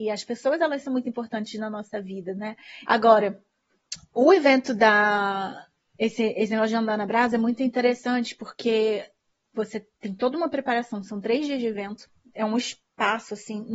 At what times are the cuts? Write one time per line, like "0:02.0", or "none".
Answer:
0:02.8